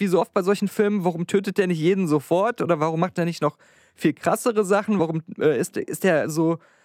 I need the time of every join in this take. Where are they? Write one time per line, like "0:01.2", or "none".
none